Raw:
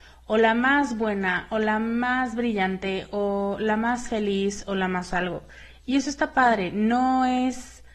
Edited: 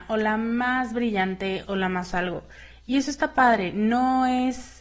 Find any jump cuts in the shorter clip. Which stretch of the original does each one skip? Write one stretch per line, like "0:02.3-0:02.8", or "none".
0:03.1-0:04.6